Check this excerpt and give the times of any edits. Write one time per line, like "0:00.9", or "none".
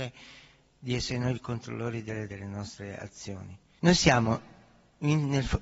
0:02.3
0:03.8